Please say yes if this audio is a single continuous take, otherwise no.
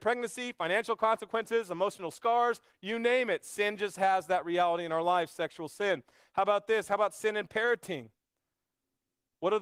yes